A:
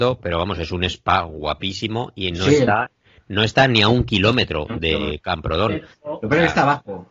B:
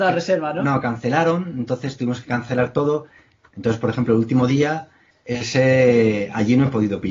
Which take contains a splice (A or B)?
B